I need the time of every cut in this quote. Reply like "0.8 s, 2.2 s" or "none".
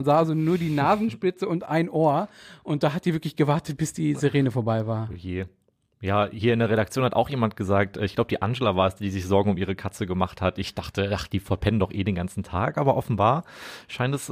none

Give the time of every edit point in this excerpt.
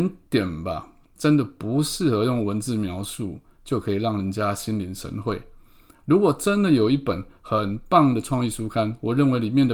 1.2 s

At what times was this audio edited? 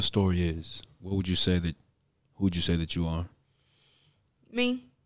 1.0 s

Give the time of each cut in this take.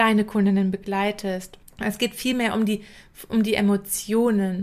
none

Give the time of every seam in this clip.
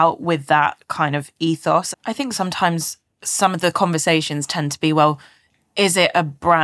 1.9 s

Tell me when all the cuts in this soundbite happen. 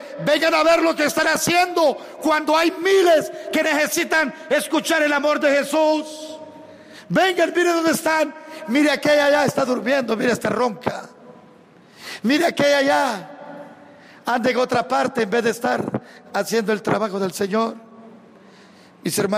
none

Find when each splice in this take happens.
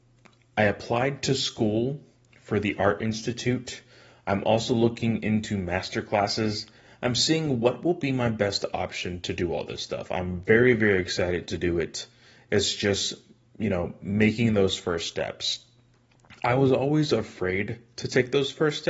none

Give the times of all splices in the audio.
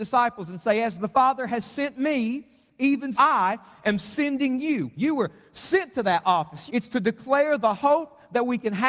3.1 s, 5.0 s, 6.7 s

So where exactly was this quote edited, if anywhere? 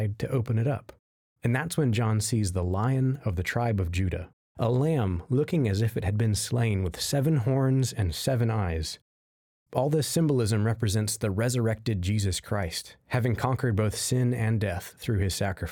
4.5 s

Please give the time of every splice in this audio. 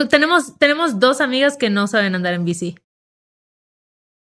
none

